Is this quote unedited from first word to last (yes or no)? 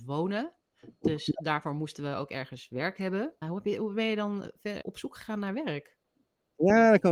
no